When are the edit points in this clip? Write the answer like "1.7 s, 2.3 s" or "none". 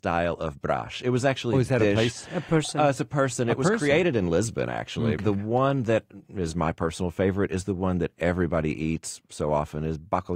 5.2 s